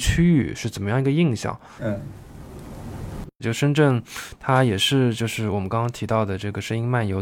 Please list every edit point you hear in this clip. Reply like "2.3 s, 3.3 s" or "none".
1.8 s, 3.4 s